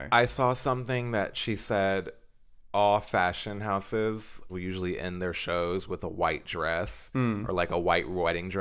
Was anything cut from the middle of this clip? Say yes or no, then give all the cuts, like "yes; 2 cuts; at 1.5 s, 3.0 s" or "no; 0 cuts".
yes; 1 cut; at 4.5 s